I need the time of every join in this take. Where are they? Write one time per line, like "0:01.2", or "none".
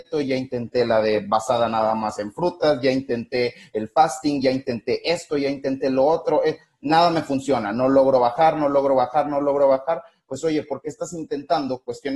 none